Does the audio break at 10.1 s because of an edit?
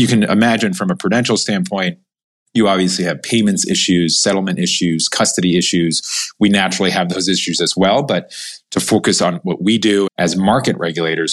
yes; 1 cut; at 10.1 s

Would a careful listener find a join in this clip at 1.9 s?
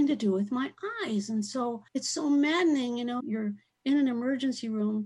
yes; 2 cuts; at 1.9 s, 3.2 s

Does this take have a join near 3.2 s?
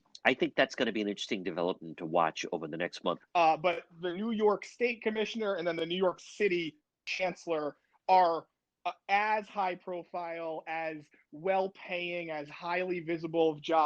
yes; 1 cut; at 3.2 s

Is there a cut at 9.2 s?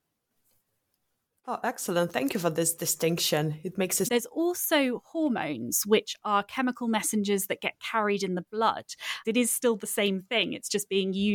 yes; 2 cuts; at 4.1 s, 9.2 s

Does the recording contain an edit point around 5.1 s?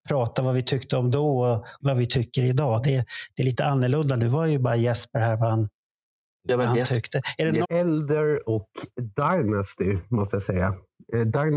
no; 2 cuts; at 1.8 s, 7.6 s

